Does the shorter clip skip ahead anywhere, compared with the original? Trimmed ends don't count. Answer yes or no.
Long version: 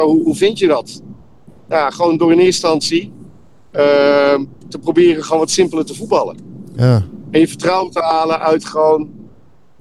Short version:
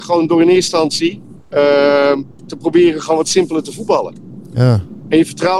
yes